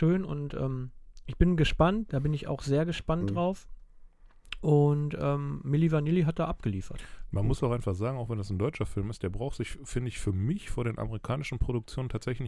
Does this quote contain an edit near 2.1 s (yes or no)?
yes